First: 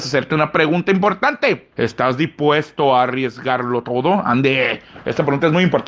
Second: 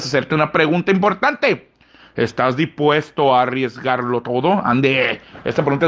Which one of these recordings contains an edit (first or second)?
first